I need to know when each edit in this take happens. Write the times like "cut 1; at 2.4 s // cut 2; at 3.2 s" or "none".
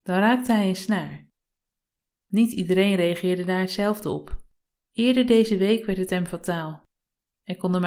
cut 1; at 4.9 s